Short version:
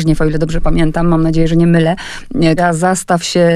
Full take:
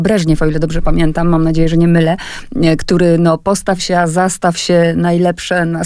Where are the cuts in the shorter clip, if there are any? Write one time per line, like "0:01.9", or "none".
0:02.6